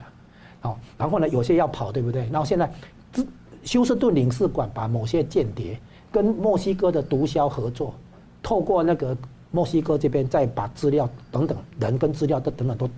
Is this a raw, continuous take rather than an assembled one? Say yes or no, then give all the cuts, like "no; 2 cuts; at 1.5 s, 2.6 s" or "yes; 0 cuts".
yes; 0 cuts